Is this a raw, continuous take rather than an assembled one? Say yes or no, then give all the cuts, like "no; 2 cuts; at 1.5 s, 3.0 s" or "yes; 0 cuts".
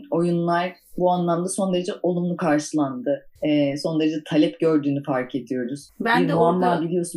no; 2 cuts; at 3.4 s, 5.9 s